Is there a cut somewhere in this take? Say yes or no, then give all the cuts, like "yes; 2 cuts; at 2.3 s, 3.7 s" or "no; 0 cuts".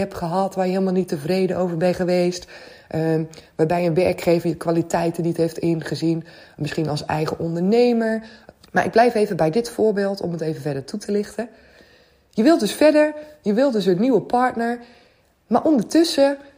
yes; 1 cut; at 8.6 s